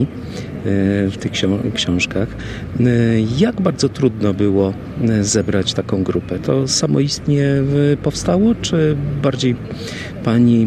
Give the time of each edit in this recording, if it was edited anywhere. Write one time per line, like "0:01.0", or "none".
none